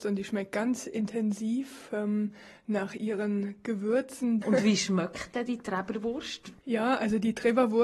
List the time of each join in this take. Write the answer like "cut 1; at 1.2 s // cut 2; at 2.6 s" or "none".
cut 1; at 4.4 s // cut 2; at 6.6 s